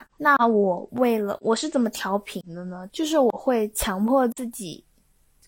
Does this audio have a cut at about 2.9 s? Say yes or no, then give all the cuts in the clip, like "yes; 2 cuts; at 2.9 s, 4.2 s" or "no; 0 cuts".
yes; 1 cut; at 2.9 s